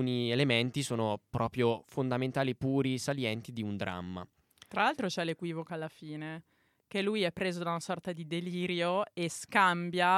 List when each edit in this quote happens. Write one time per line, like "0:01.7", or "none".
none